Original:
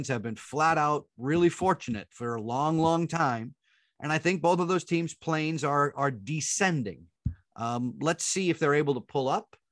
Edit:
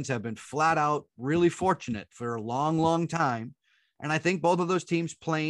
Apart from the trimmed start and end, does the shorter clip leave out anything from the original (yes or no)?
no